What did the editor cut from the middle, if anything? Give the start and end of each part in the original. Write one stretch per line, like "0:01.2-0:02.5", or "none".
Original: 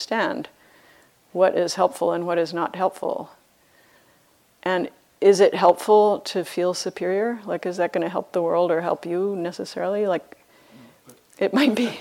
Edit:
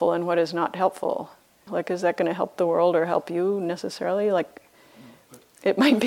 0:03.7-0:07.4